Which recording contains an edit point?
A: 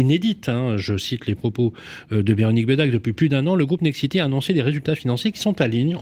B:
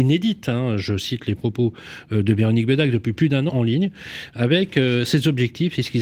B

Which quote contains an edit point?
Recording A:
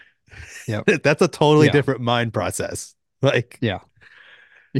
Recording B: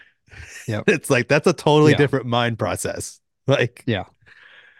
A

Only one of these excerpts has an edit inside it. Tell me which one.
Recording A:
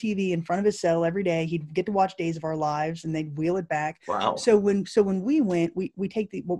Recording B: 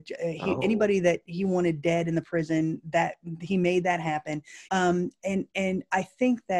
B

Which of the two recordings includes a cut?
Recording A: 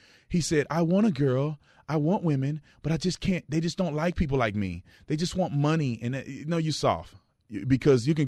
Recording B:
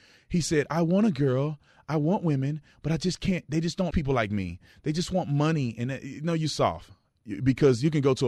B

